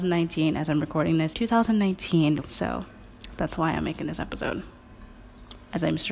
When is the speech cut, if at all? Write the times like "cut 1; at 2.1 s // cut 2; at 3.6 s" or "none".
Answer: cut 1; at 1.3 s // cut 2; at 2.4 s